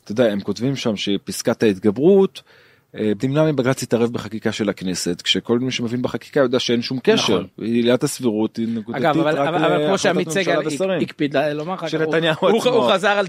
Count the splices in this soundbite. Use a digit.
1